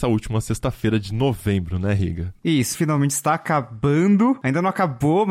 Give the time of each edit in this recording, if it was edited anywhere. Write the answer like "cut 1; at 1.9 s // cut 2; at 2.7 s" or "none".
cut 1; at 2.7 s